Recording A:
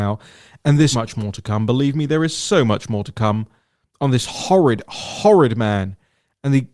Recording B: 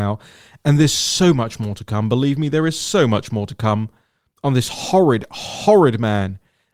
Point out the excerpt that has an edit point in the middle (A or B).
A